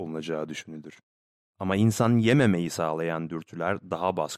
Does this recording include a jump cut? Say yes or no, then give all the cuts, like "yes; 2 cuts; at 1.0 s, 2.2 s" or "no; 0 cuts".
yes; 1 cut; at 1.4 s